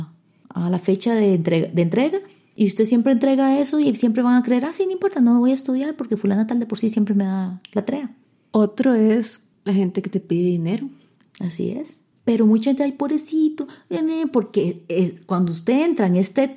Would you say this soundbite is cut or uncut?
uncut